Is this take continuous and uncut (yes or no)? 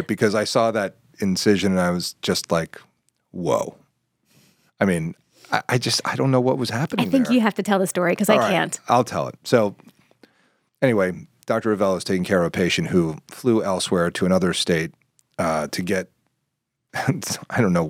yes